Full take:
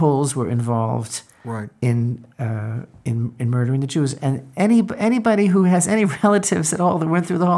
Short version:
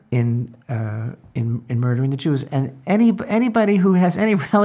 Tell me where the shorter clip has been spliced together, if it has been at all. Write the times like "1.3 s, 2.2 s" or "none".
none